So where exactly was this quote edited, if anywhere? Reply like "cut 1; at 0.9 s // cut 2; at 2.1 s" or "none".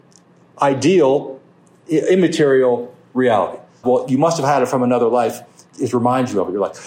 cut 1; at 3.8 s // cut 2; at 5.7 s